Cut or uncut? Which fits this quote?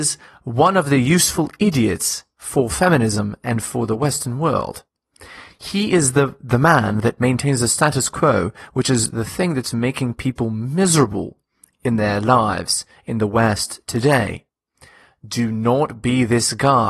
uncut